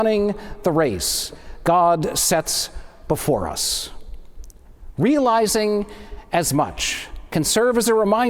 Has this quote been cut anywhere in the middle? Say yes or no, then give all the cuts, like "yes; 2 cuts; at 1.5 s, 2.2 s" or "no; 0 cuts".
no; 0 cuts